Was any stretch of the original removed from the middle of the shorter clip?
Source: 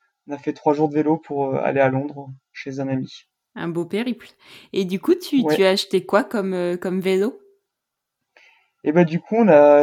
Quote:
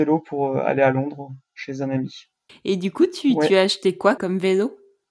yes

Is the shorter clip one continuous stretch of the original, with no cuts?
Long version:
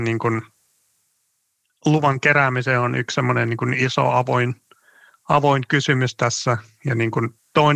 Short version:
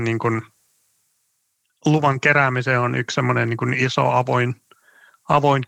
yes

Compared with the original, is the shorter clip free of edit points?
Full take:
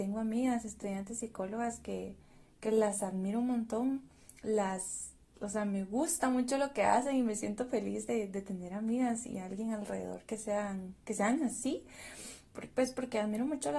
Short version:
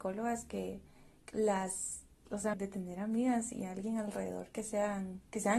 no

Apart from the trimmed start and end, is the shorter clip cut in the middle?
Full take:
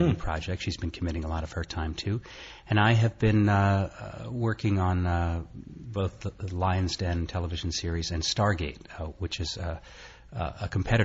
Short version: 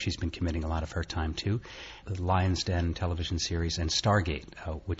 yes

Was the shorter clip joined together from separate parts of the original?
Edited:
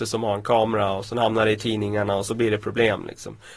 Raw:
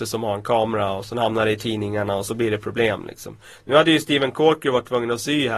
no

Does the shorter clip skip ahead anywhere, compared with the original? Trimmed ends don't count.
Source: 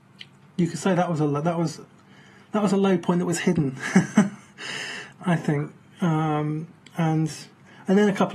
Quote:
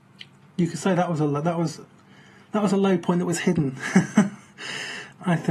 no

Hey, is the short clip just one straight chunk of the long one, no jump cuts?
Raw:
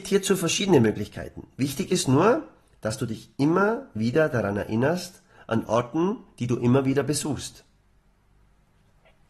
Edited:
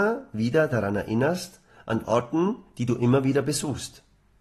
yes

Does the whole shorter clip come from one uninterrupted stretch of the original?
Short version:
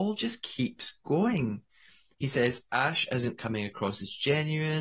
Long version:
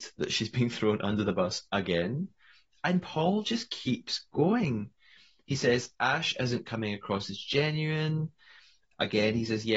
yes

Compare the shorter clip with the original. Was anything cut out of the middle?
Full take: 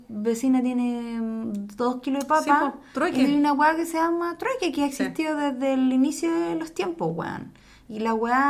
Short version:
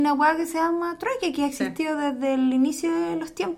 no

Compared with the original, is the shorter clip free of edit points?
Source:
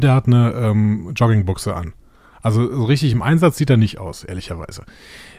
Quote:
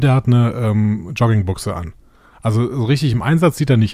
yes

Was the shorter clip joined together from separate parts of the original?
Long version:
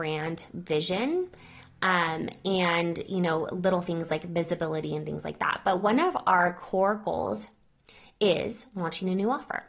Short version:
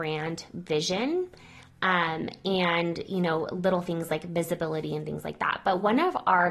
no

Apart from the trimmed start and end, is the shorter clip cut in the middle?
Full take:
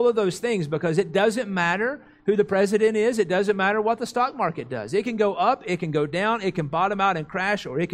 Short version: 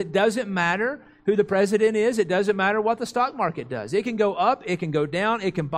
no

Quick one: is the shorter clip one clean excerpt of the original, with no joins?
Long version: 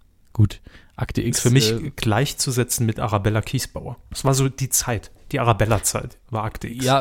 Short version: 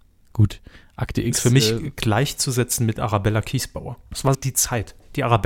no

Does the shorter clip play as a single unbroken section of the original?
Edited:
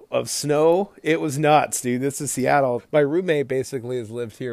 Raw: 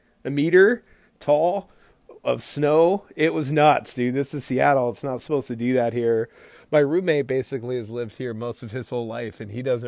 no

